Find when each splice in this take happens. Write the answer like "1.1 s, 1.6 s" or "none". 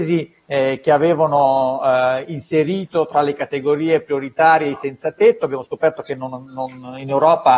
none